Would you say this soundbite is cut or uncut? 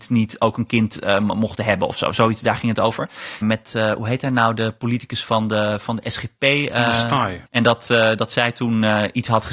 cut